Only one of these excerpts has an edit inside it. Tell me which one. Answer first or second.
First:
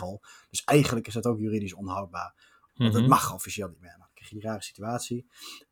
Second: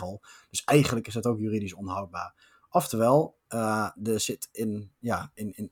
first